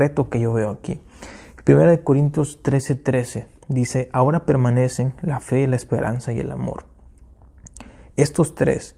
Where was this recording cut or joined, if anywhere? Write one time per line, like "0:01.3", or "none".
none

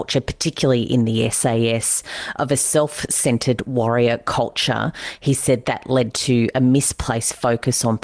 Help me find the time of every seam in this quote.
0:05.6

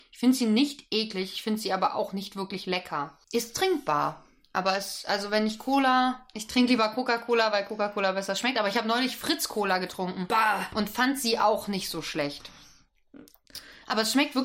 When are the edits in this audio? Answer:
0:06.3

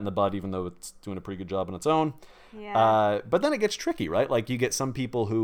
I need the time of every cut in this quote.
none

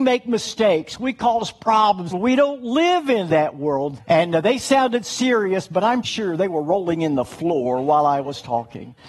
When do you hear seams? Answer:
0:02.1
0:04.0
0:06.0

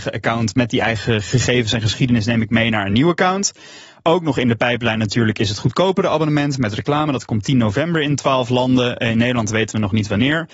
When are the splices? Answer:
none

